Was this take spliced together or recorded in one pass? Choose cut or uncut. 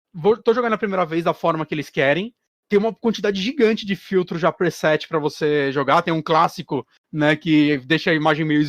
uncut